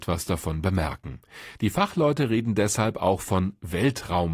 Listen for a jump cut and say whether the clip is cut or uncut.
cut